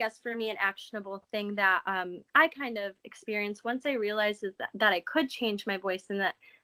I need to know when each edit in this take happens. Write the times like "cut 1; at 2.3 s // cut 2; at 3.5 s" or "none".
cut 1; at 2.3 s